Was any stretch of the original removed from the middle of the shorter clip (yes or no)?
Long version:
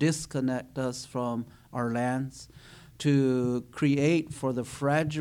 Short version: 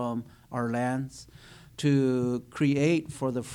no